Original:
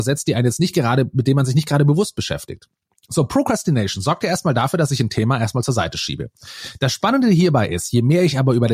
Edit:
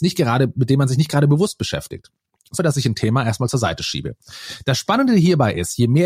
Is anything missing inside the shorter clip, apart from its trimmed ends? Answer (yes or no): yes